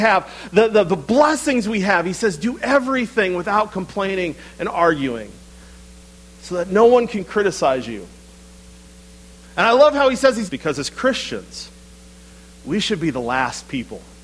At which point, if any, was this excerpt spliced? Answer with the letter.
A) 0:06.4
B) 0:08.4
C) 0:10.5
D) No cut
C